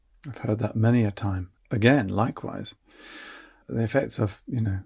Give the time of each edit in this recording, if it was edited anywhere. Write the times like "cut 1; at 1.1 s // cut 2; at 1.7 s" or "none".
cut 1; at 1.6 s // cut 2; at 3.6 s